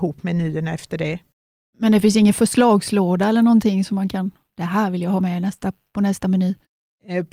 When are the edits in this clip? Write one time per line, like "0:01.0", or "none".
none